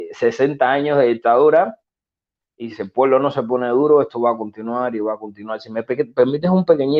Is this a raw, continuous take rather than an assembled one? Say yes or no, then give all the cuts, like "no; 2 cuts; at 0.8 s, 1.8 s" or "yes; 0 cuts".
no; 1 cut; at 2.7 s